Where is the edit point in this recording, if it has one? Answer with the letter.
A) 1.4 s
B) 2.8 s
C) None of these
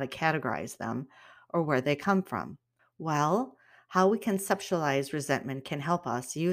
B